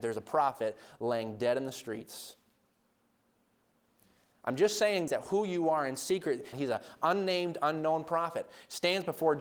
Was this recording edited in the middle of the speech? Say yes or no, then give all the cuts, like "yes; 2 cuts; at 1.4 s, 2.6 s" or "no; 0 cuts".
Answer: yes; 2 cuts; at 5.1 s, 6.5 s